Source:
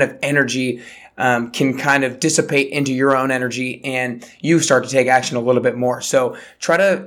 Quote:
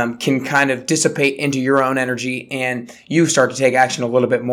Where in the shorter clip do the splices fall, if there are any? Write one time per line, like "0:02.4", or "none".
none